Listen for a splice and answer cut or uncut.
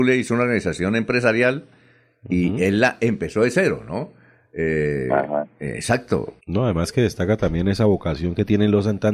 cut